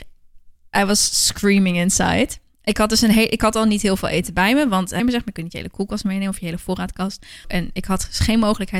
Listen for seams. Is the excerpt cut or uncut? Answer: cut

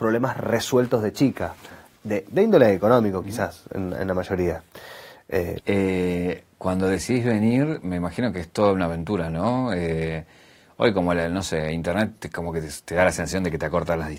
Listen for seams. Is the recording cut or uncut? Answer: cut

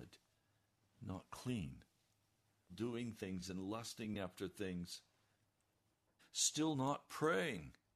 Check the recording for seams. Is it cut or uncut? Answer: cut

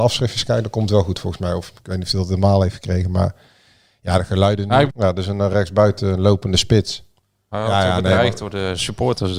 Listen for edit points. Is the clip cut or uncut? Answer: cut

